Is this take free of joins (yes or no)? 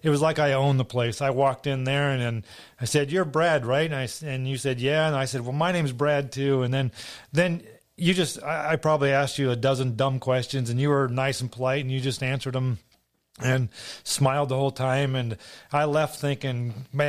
yes